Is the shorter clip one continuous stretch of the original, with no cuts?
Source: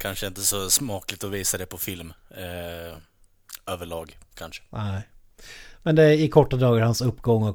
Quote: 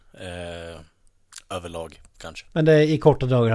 no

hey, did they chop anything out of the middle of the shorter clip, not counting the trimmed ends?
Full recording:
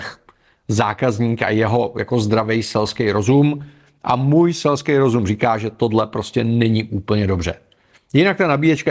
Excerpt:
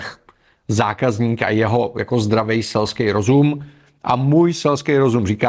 no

